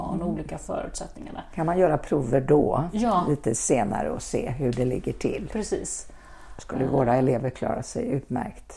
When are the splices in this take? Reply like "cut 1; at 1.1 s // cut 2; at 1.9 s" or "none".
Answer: none